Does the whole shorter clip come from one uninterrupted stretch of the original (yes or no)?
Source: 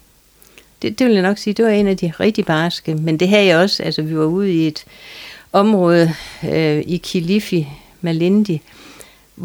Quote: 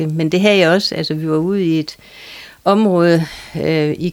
yes